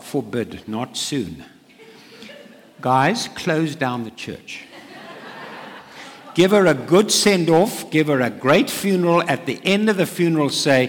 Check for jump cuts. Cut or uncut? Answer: uncut